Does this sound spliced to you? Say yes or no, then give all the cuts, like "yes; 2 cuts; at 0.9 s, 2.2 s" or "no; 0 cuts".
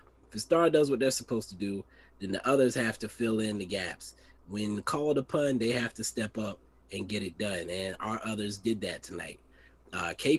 no; 0 cuts